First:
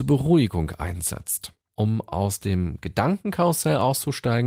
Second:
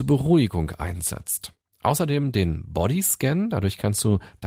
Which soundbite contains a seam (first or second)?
first